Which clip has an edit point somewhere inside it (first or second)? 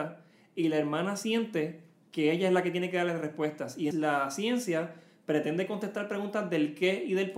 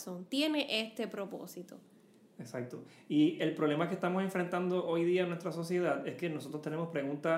first